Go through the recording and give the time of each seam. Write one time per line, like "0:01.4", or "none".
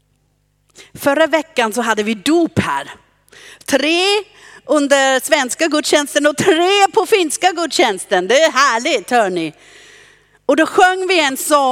none